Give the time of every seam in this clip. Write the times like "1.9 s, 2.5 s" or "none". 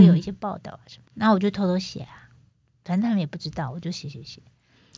1.0 s